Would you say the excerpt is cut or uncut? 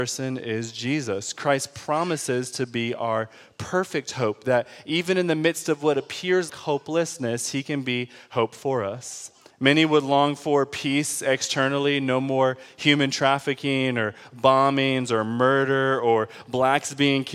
cut